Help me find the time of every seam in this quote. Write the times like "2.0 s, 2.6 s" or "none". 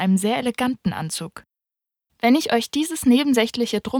2.1 s